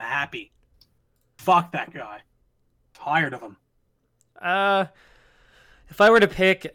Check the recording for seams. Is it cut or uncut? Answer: uncut